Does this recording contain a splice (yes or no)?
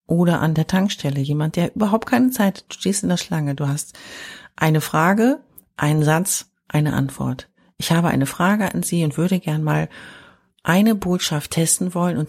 no